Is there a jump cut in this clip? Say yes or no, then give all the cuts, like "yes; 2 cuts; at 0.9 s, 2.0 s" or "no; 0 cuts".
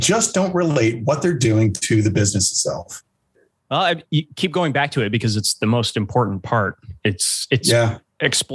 no; 0 cuts